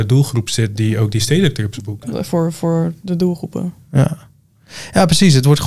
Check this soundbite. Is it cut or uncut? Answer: cut